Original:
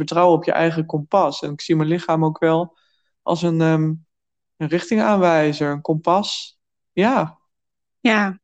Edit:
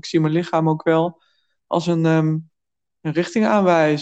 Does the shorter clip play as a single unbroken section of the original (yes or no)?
yes